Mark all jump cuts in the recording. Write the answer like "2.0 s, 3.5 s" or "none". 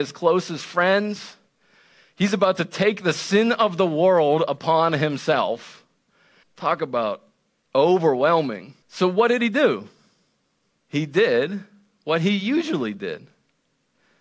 6.4 s, 8.8 s, 10.7 s